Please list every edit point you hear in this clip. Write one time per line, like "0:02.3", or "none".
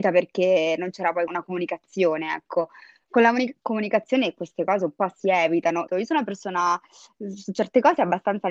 0:01.3
0:05.9